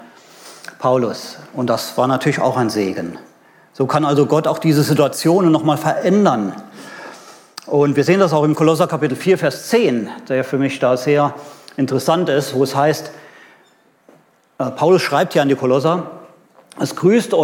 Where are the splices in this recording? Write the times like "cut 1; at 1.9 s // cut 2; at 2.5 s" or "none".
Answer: none